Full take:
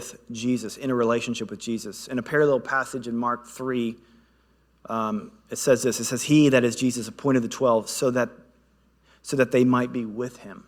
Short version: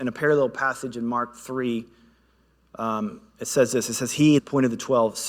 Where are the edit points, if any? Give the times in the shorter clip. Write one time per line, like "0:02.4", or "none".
0:04.4